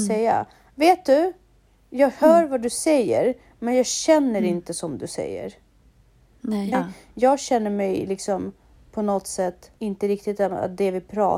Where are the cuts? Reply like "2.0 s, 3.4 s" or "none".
6.7 s, 9.8 s